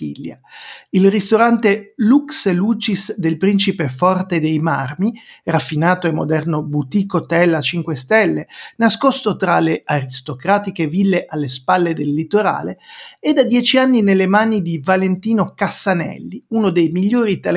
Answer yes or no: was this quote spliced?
no